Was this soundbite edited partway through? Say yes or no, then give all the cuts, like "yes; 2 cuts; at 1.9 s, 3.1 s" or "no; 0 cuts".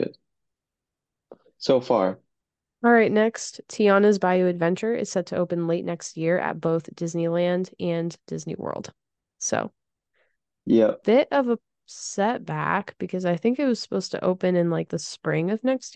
no; 0 cuts